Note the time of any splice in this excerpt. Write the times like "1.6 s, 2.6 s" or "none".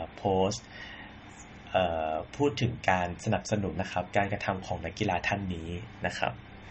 3.7 s